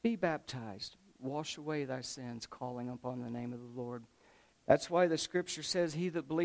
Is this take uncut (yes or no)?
no